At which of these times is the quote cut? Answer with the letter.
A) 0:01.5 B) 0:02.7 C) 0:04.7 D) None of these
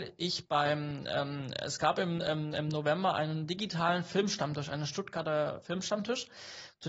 D